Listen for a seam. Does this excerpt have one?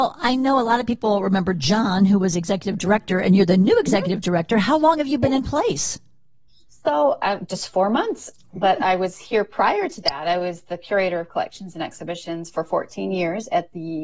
no; 0 cuts

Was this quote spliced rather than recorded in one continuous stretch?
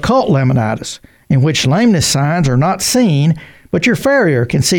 no; 0 cuts

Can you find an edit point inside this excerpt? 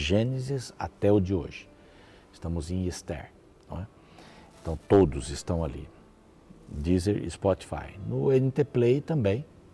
no; 0 cuts

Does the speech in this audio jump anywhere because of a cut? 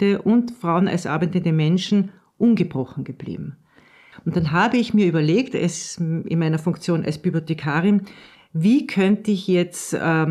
yes; 1 cut; at 4.1 s

